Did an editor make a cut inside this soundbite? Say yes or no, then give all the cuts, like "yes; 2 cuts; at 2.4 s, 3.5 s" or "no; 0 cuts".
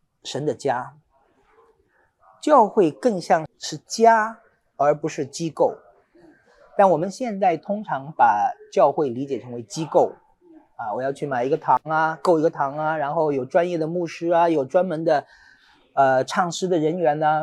yes; 1 cut; at 3.5 s